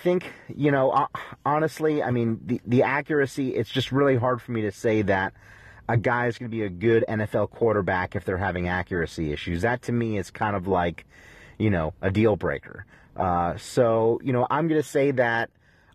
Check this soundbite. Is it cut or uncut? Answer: uncut